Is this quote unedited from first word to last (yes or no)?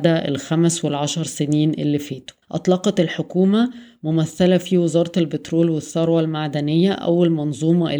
no